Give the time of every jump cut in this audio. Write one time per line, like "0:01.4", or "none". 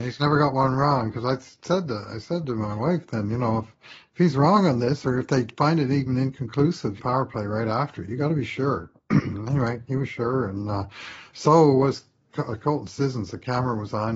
0:07.0